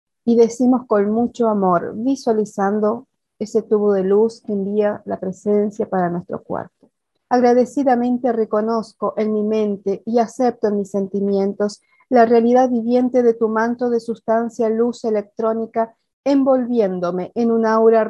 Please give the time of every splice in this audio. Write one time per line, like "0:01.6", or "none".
0:07.2